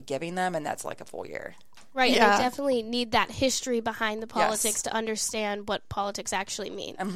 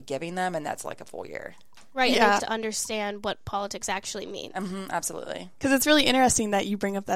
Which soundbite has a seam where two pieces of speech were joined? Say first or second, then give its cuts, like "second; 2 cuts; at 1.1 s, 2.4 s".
second; 1 cut; at 2.4 s